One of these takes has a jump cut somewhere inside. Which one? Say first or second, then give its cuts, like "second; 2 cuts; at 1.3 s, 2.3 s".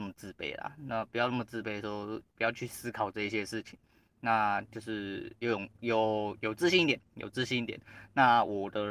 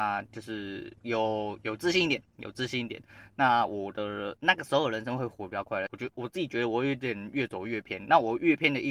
second; 2 cuts; at 1.0 s, 5.9 s